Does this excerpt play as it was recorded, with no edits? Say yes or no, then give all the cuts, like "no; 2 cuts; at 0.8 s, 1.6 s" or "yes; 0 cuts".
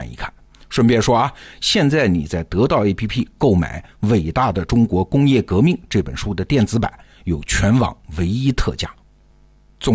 yes; 0 cuts